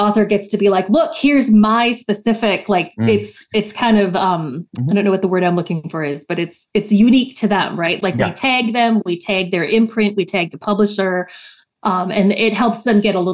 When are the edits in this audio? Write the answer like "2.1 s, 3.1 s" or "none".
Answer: none